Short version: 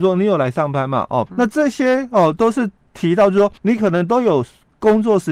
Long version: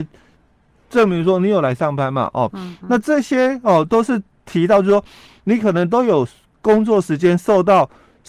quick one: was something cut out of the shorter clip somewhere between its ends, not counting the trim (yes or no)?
yes